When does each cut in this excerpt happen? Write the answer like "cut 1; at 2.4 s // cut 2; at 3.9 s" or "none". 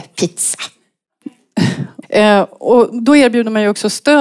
cut 1; at 2.0 s